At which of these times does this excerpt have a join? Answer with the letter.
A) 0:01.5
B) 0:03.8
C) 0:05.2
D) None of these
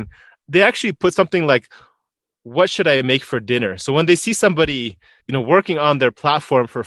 C